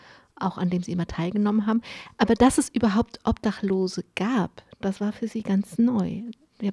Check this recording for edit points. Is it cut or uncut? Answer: uncut